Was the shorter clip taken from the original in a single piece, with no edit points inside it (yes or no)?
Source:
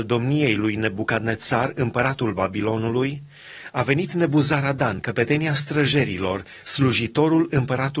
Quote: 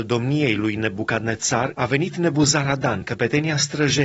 no